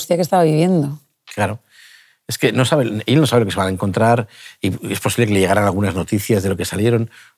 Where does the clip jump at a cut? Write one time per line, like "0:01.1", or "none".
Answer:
none